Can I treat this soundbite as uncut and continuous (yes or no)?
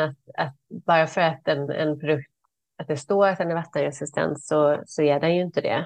yes